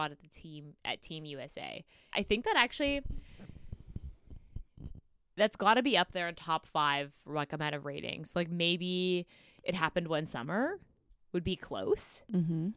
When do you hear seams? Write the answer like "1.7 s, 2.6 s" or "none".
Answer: 2.1 s